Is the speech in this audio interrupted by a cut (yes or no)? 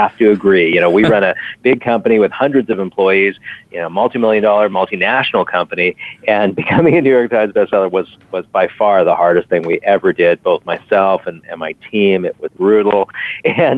no